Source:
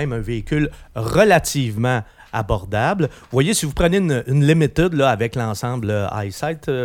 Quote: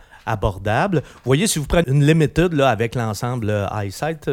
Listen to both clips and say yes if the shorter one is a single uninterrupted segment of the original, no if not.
no